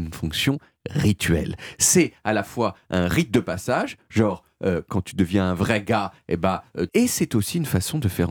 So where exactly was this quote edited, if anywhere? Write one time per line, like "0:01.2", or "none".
0:06.9